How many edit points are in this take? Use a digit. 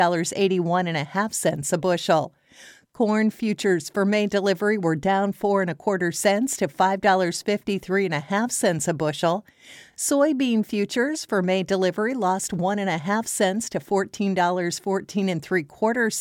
0